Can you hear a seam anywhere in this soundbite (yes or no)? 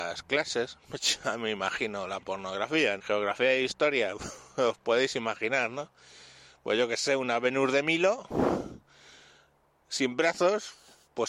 yes